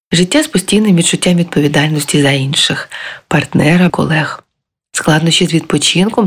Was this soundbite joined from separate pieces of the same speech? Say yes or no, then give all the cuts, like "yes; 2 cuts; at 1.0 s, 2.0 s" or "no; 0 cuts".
yes; 1 cut; at 3.9 s